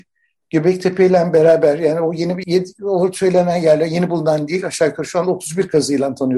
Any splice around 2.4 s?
yes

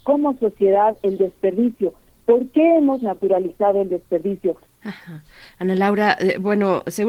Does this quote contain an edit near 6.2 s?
no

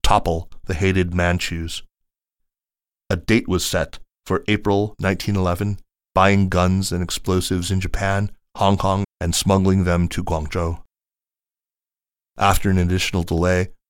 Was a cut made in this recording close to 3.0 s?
no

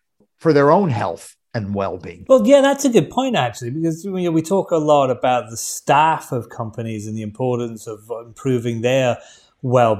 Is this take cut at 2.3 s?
no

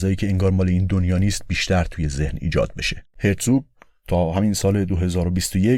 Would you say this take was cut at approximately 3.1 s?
yes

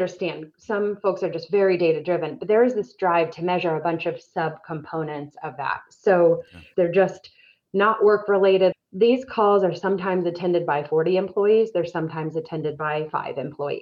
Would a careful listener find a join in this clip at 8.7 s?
yes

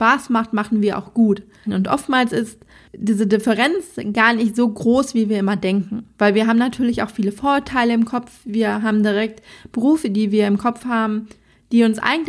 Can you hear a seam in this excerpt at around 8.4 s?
no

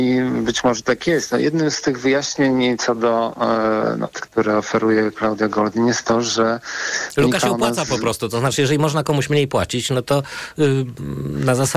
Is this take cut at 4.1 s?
yes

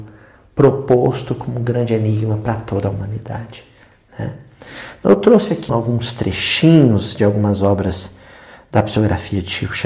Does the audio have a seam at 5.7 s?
yes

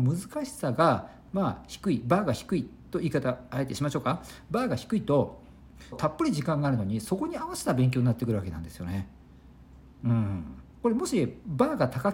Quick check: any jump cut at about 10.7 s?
yes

